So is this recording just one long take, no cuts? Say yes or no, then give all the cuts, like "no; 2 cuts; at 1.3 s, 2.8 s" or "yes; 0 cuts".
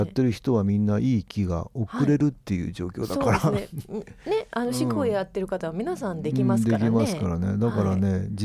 yes; 0 cuts